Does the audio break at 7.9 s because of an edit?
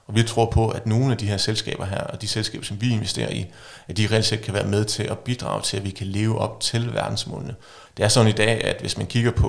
yes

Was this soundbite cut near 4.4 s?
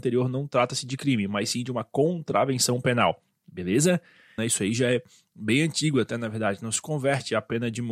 yes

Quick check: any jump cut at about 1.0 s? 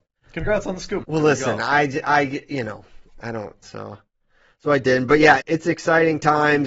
yes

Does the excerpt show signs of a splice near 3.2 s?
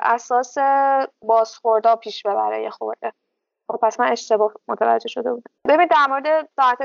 no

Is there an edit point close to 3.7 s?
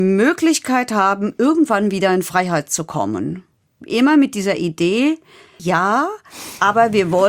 no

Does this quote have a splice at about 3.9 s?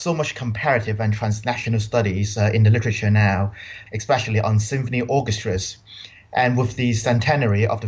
yes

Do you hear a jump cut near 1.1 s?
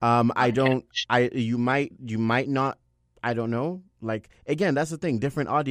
no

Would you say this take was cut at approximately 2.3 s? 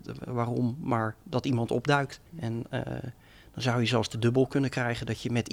yes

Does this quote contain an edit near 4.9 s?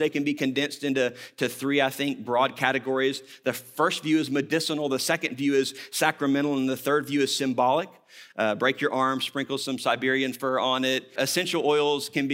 no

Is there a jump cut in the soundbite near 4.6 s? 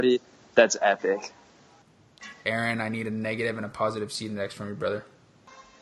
no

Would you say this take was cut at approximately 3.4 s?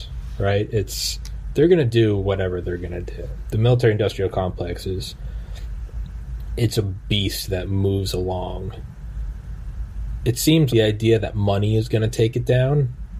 no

